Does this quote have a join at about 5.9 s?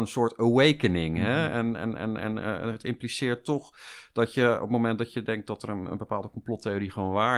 no; 0 cuts

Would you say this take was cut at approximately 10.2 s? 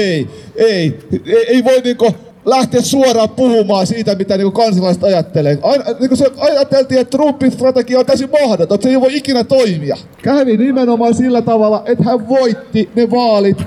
yes; 1 cut; at 10.2 s

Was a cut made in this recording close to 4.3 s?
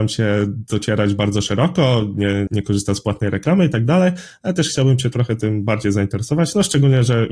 no; 1 cut; at 2.5 s

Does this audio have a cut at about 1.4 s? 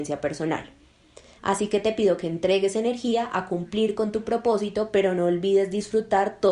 yes; 1 cut; at 1.4 s

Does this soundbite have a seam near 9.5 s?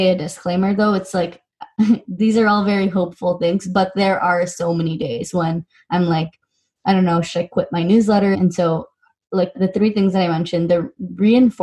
yes; 2 cuts; at 8.3 s, 9.5 s

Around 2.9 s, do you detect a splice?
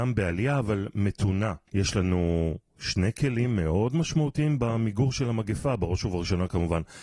no; 1 cut; at 1.7 s

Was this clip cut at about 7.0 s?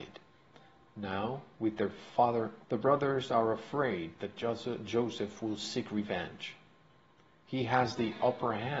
no; 1 cut; at 2.6 s

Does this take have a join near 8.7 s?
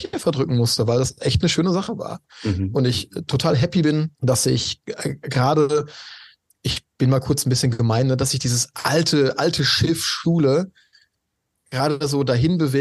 no; 1 cut; at 4.1 s

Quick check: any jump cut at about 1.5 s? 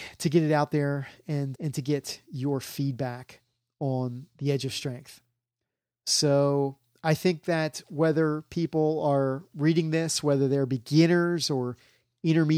yes; 1 cut; at 1.5 s

